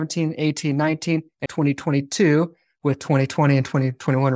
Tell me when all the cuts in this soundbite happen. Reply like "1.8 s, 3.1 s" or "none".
1.5 s